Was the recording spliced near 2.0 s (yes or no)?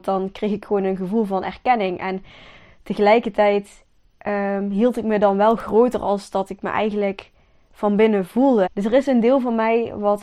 no